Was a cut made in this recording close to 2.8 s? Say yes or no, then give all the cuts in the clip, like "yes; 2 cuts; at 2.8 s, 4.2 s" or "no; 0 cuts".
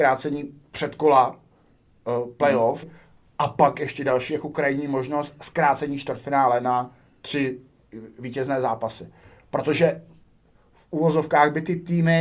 yes; 1 cut; at 2.8 s